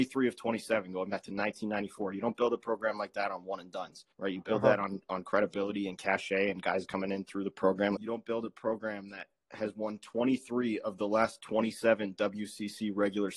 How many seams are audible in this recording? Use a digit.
2